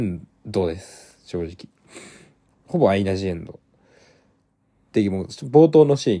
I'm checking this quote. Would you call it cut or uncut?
uncut